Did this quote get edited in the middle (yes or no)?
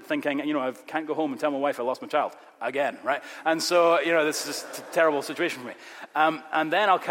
no